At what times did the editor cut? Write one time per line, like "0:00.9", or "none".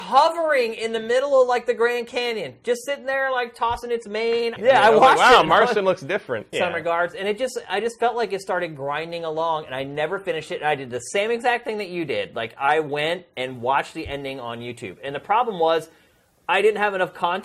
0:04.6
0:06.5